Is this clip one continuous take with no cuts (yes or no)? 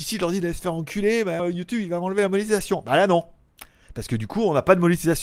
no